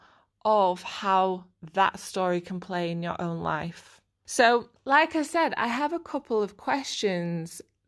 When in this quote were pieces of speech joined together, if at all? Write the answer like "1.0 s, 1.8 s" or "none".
none